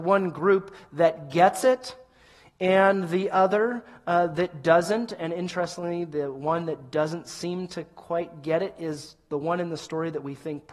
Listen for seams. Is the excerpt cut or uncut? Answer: uncut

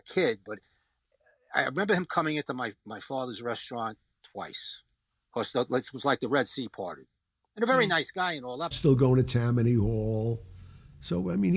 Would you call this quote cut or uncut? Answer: cut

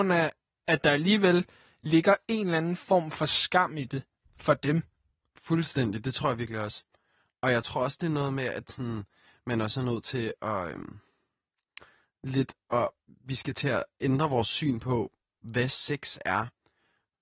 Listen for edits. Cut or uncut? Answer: uncut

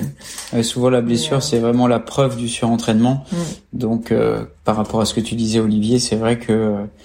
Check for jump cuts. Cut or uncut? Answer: uncut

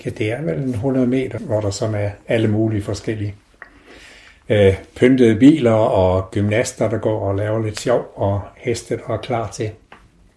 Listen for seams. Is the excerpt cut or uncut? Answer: uncut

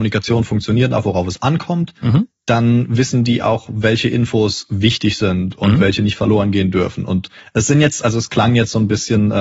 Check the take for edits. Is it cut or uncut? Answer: uncut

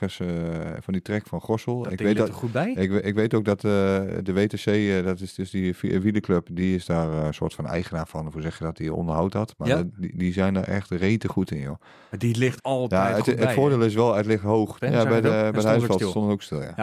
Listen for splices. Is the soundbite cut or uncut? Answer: cut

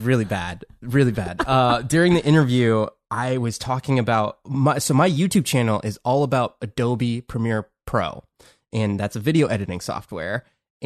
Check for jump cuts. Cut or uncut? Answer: uncut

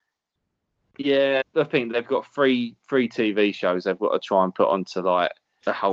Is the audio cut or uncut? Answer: cut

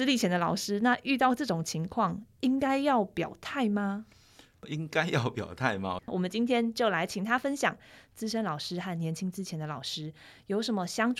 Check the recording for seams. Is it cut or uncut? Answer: cut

